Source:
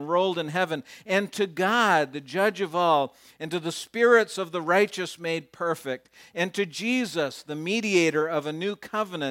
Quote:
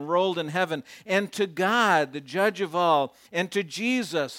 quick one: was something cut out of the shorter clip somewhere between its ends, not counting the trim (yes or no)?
yes